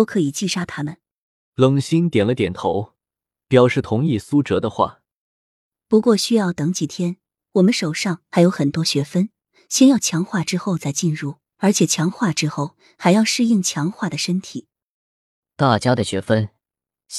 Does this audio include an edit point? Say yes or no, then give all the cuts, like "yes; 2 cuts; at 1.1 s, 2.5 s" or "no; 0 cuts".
yes; 2 cuts; at 1.5 s, 11.5 s